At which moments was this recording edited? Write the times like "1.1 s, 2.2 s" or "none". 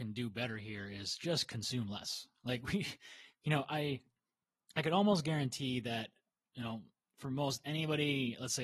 none